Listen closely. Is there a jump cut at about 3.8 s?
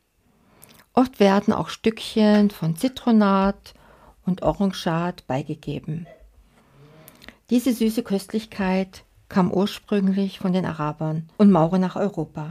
no; 1 cut; at 11.3 s

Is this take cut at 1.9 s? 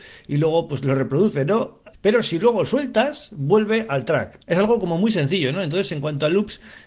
yes; 1 cut; at 1.9 s

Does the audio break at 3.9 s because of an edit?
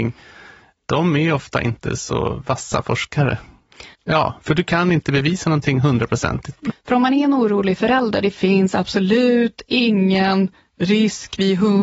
yes; 3 cuts; at 3.9 s, 6.7 s, 8.2 s

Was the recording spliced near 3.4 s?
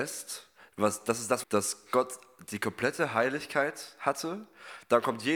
no; 1 cut; at 1.4 s

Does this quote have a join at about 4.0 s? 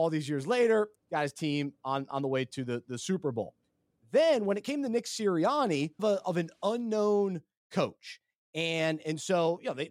no; 2 cuts; at 0.9 s, 6.0 s

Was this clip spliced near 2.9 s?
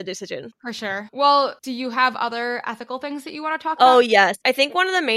no; 1 cut; at 1.6 s

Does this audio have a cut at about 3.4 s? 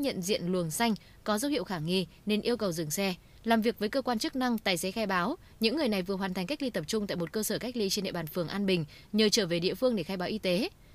yes; 1 cut; at 3.4 s

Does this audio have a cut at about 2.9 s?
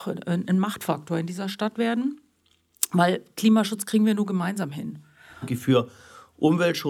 no; 1 cut; at 5.4 s

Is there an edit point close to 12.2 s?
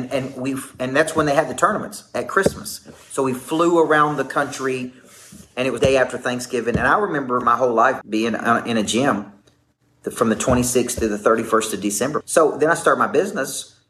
yes; 3 cuts; at 5.8 s, 8.0 s, 12.2 s

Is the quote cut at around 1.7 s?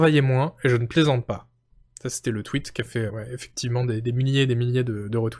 no; 1 cut; at 3.1 s

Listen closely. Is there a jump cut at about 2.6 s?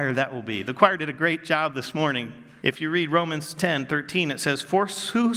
yes; 1 cut; at 2.6 s

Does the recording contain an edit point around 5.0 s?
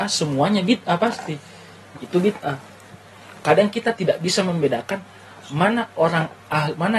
no; 1 cut; at 2.0 s

